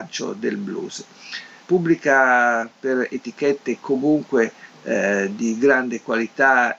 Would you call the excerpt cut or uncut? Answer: cut